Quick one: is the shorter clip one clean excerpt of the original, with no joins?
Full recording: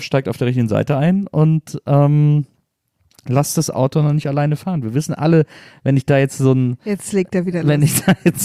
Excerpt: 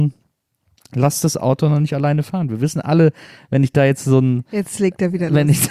yes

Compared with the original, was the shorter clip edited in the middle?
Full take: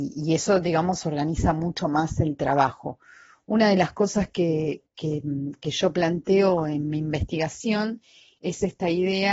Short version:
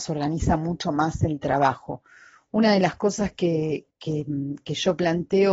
no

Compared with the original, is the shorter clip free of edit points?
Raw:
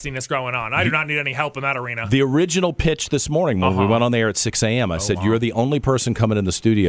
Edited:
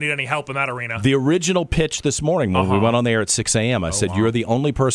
yes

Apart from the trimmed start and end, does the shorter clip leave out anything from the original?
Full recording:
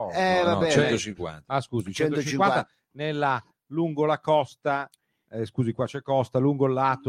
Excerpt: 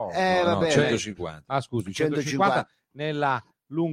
no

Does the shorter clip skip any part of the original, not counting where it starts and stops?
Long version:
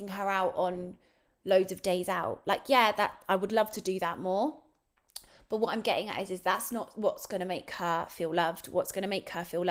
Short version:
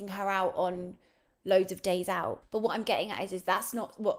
yes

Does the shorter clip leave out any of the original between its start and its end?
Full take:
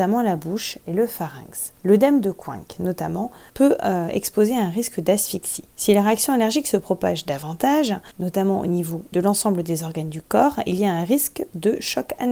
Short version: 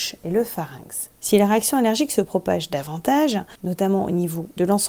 yes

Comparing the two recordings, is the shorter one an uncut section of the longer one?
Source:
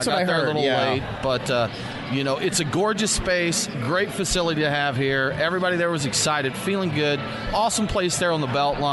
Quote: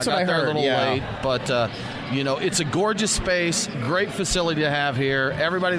yes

